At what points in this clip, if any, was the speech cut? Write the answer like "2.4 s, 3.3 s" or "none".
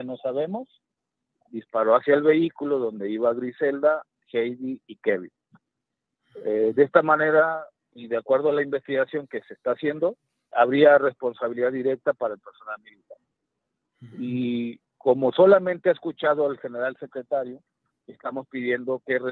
10.5 s, 18.0 s